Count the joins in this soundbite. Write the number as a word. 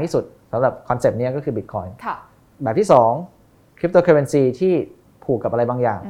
zero